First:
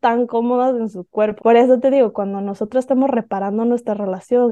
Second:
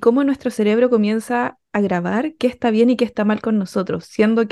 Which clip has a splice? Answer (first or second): first